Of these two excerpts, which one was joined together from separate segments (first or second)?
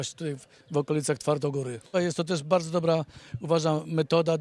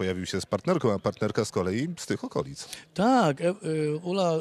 first